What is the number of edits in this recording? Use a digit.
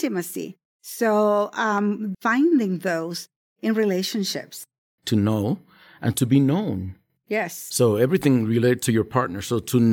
2